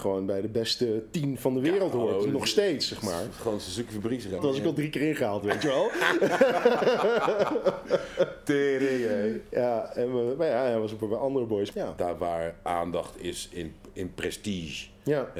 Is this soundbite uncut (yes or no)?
no